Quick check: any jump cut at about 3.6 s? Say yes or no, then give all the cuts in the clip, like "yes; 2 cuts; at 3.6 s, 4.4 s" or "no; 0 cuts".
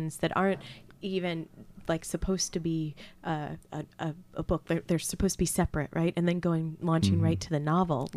yes; 1 cut; at 3.6 s